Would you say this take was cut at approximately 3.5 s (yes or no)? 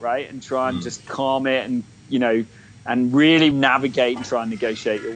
yes